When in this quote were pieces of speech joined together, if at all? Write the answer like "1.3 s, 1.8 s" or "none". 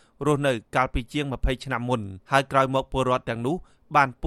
2.2 s